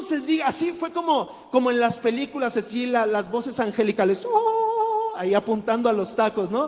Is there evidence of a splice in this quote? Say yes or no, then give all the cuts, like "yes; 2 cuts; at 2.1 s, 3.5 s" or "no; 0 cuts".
no; 0 cuts